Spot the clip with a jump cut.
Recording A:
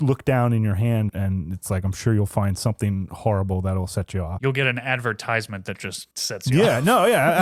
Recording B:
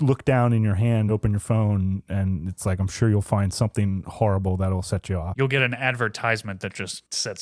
A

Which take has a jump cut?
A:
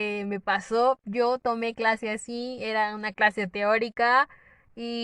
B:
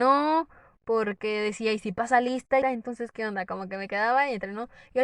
B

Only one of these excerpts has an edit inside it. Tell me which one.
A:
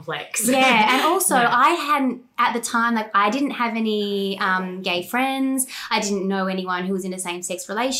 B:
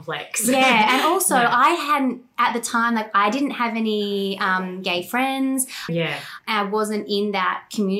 B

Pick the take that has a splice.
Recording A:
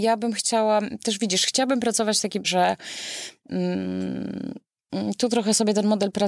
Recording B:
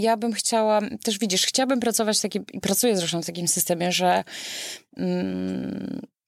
A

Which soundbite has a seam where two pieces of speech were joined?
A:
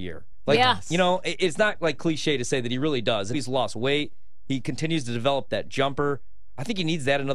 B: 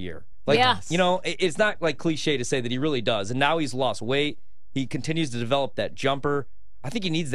A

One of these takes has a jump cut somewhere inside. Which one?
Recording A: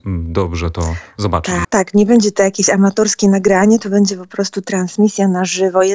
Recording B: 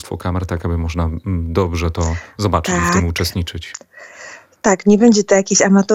A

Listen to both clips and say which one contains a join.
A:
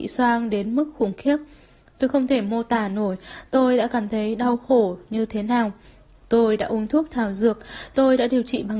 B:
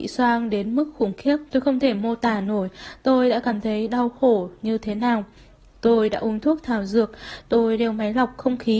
B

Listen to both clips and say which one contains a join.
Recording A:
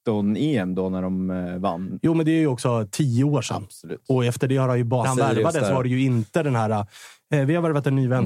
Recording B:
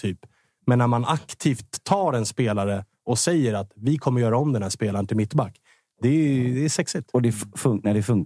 A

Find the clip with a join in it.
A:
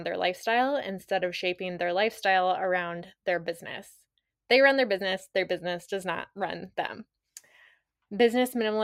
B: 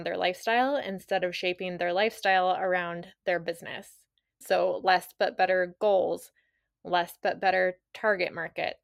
B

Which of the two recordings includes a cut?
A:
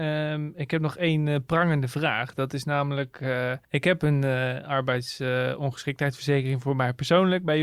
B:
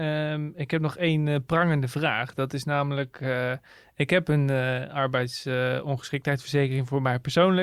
A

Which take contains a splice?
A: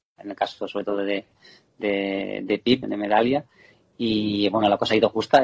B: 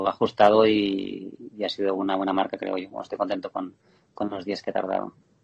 A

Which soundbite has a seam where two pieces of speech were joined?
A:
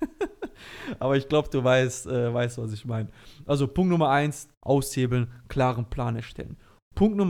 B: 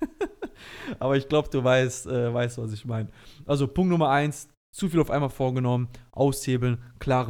A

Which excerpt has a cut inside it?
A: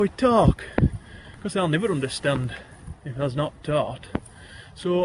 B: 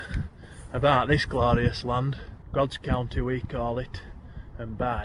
B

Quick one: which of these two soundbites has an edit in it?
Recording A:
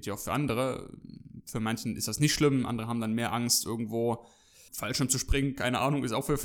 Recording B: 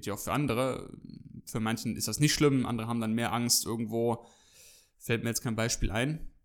A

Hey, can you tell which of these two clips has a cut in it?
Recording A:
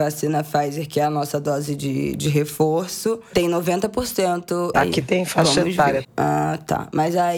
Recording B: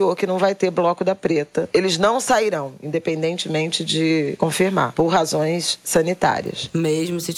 A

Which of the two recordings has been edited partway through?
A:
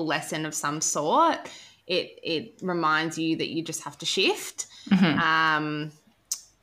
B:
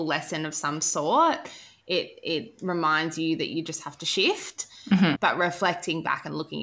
B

